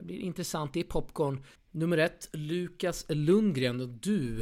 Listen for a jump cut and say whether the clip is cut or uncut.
cut